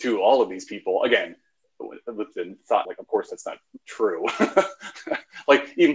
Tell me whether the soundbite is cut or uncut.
cut